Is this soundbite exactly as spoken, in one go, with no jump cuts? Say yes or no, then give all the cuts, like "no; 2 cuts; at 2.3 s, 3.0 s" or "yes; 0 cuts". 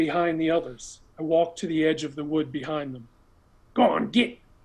no; 1 cut; at 1.1 s